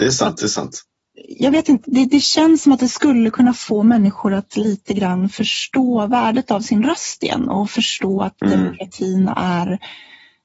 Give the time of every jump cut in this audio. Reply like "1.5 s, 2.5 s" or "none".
1.8 s